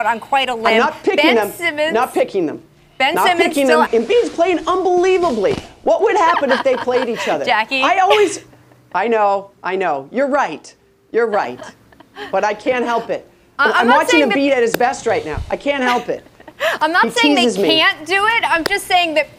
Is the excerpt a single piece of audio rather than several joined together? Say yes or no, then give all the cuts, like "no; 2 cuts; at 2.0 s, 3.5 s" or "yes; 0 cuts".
no; 1 cut; at 3.9 s